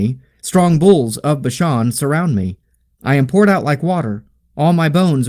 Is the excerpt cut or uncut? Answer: cut